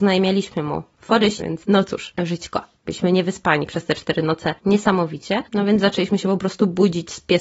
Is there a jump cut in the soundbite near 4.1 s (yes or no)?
no